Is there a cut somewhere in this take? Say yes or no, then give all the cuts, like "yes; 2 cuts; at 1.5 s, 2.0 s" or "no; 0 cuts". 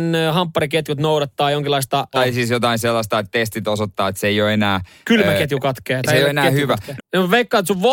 yes; 2 cuts; at 2.1 s, 7.0 s